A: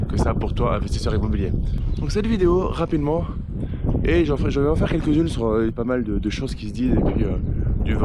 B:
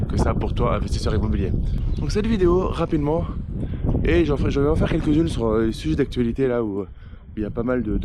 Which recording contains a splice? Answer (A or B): A